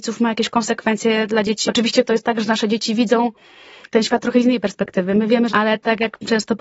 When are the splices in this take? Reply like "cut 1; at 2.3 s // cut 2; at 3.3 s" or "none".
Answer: cut 1; at 1.6 s // cut 2; at 5.5 s